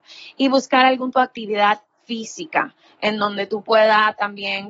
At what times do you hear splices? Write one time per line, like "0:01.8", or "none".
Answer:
0:01.1